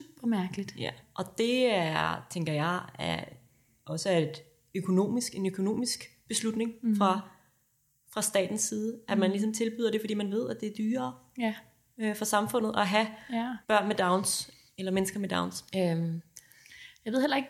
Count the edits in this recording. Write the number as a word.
two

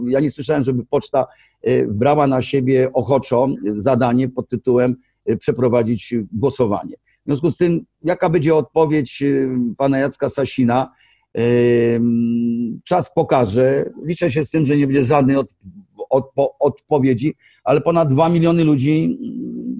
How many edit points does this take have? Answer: zero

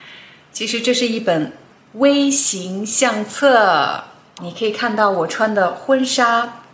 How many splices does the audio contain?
one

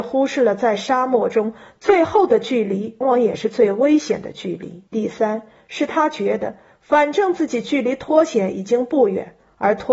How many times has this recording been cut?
two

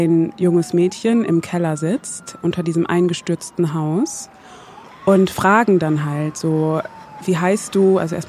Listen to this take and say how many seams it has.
one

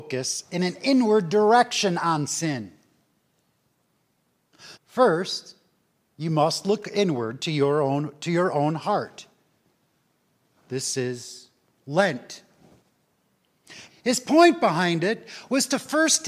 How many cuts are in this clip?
two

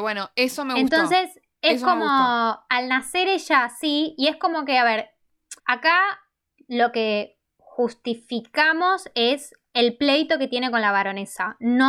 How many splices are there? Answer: one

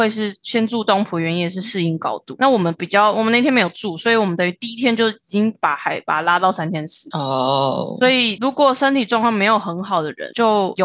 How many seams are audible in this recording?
zero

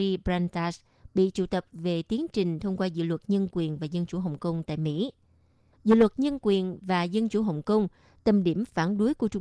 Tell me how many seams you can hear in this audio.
one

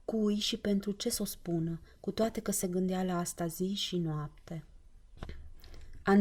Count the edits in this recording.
zero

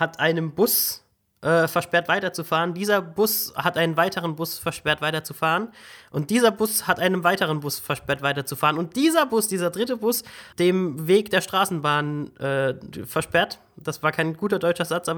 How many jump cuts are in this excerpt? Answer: one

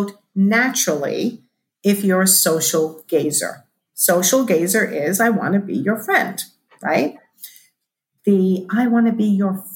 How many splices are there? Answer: one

